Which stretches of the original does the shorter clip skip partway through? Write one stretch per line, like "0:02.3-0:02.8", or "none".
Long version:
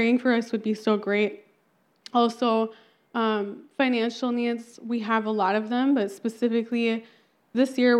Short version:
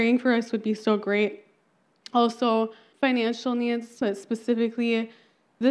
0:02.9-0:03.7
0:04.8-0:06.0